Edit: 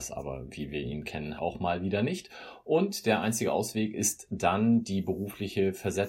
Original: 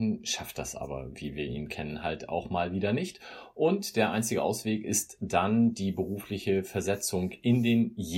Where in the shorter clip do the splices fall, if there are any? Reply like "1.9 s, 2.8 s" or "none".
1.4 s